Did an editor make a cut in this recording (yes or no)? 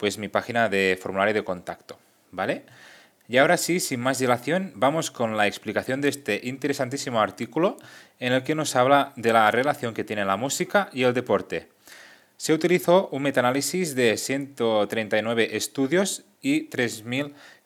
no